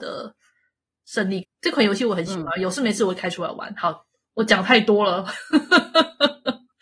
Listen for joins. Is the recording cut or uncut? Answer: cut